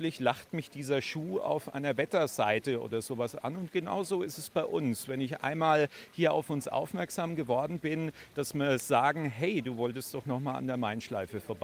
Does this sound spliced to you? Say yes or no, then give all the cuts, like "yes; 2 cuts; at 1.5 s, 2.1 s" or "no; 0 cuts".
no; 0 cuts